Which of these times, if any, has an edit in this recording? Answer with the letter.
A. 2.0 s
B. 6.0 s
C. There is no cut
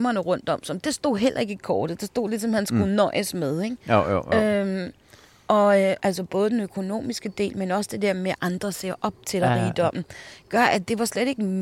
B